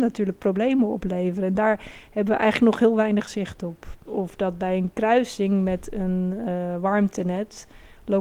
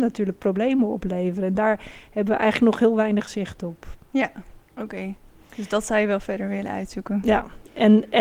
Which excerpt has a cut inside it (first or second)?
first